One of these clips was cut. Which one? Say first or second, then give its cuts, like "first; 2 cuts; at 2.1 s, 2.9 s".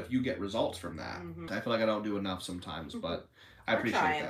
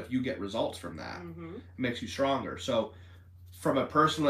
first; 1 cut; at 1.5 s